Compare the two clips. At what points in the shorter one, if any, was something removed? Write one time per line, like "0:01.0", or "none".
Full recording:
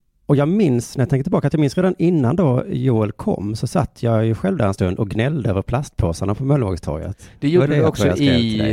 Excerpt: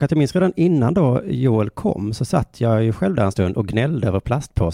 none

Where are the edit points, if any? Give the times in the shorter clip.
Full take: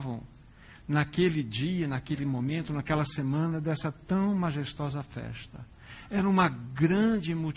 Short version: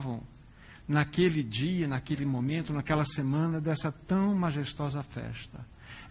none

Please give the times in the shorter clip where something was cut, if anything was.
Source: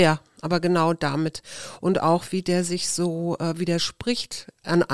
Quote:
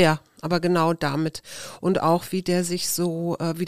none

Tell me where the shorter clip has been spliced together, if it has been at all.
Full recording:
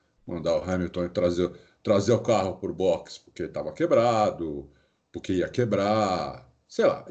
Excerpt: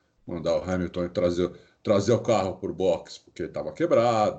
none

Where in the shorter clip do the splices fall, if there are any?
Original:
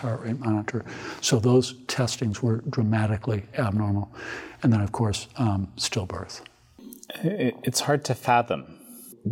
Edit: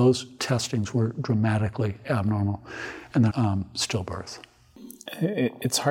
0:03.3

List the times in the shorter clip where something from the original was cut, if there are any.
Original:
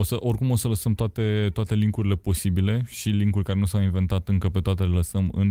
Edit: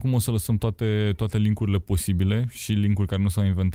none

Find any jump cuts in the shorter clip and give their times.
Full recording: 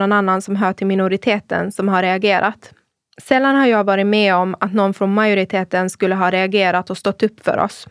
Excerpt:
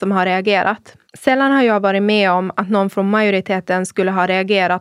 0:01.1

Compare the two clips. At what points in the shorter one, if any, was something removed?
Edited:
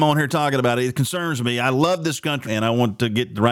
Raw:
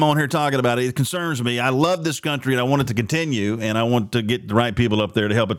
0:02.5

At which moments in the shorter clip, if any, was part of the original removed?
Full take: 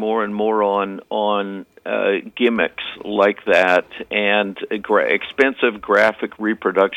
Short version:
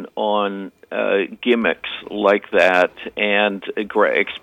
none

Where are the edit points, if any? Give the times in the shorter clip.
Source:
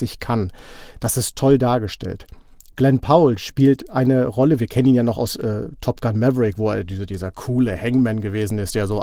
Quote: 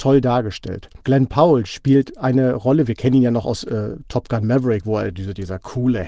0:01.0

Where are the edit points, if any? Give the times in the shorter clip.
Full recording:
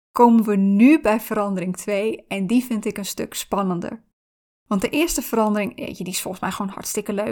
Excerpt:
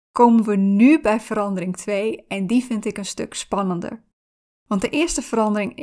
none

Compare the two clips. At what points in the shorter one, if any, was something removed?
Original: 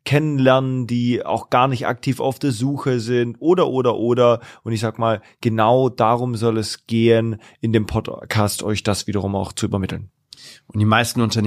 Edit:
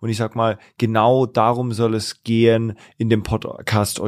none

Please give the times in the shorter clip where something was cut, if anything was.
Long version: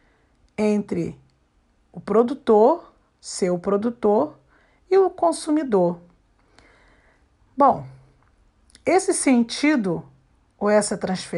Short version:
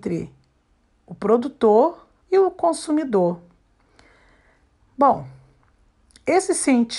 0:02.2

